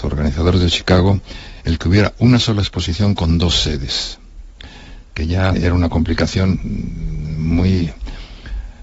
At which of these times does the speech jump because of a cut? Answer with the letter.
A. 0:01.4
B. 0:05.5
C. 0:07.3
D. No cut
B